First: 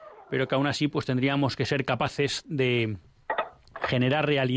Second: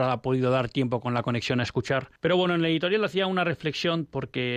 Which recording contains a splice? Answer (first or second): second